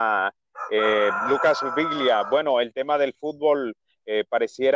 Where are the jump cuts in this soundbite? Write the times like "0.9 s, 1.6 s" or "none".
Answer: none

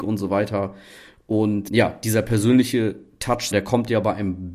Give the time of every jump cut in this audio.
1.7 s, 3.5 s

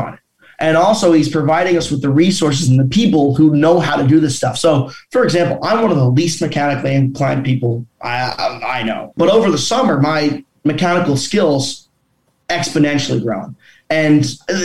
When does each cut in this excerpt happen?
9.1 s

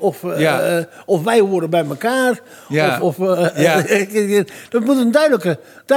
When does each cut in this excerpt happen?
3.0 s

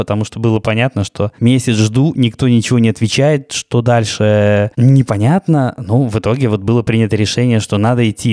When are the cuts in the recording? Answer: none

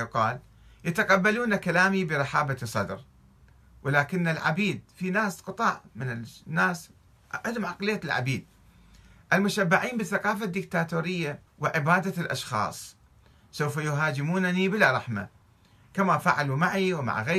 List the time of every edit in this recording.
11.5 s

